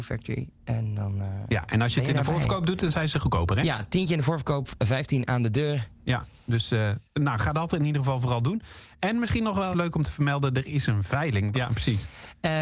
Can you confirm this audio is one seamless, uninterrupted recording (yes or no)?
no